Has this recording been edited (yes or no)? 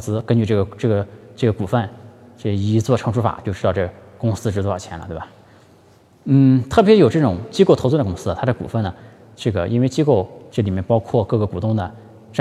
yes